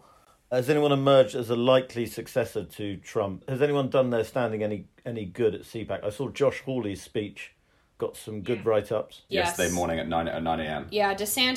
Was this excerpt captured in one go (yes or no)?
no